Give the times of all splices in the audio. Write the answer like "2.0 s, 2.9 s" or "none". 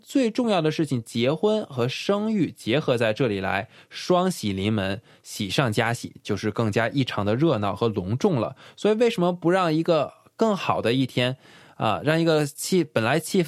none